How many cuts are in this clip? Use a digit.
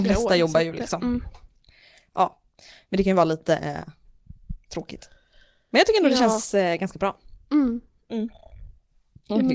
0